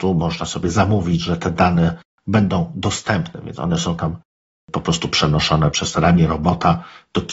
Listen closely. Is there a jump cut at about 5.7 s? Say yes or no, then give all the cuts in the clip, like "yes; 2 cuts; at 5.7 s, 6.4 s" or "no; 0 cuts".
yes; 1 cut; at 5.7 s